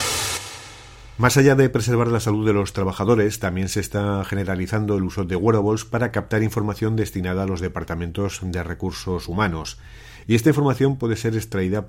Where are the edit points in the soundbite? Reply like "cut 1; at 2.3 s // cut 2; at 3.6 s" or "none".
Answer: cut 1; at 10.2 s